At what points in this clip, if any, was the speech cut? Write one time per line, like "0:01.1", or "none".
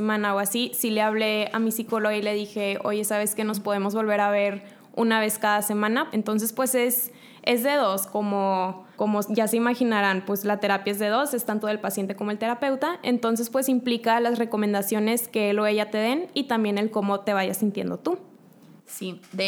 0:06.1
0:08.9